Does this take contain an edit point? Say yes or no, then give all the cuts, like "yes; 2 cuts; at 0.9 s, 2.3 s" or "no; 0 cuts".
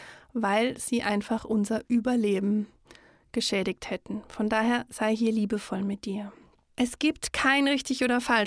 no; 0 cuts